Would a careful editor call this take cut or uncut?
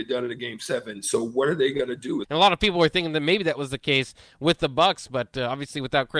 cut